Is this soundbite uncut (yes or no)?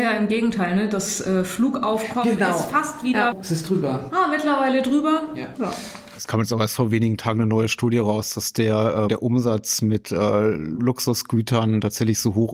no